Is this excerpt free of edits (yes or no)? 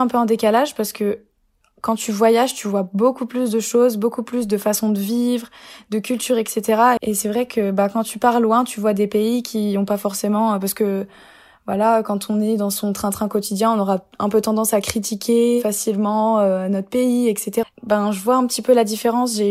no